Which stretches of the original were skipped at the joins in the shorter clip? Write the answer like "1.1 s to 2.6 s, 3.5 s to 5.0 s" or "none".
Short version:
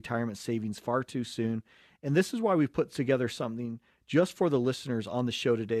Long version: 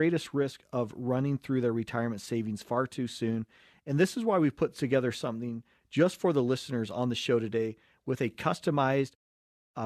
none

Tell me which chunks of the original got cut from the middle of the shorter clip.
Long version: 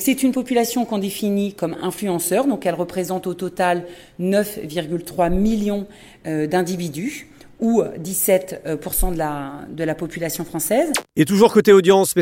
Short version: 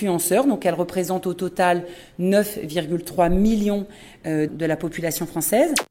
6.5 s to 9.7 s

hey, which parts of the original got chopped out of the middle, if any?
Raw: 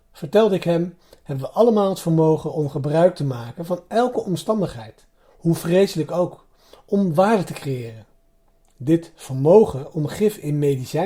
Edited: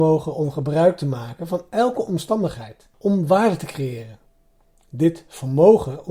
5.1 s to 6.8 s

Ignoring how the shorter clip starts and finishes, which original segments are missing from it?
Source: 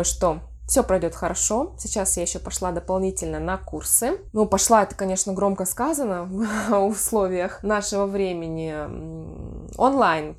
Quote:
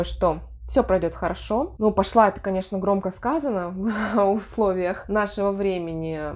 1.8 s to 4.3 s

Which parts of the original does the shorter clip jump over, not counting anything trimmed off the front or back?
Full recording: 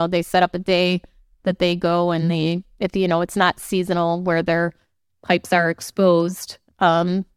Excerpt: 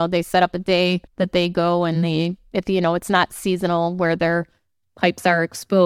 1.1 s to 1.3 s

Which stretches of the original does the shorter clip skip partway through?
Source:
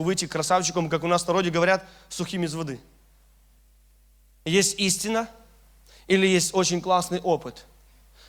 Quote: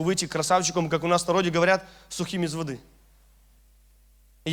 none

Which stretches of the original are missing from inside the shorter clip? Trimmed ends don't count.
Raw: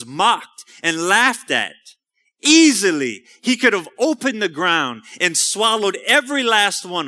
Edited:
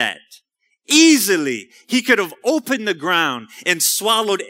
none

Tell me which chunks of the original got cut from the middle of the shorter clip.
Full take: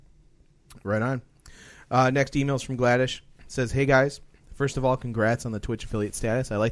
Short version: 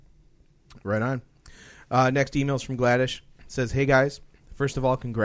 none

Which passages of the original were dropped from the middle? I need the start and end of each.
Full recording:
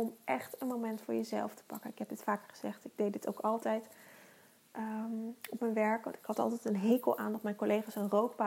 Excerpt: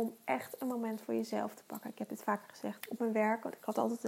2.8 s to 5.4 s

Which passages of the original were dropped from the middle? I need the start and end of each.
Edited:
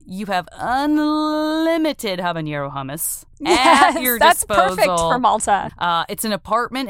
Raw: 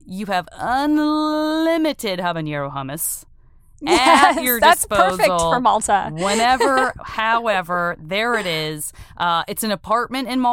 3.3 s to 3.7 s, 6.1 s to 9.1 s

